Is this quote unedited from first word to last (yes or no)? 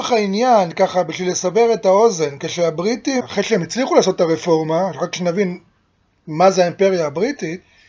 yes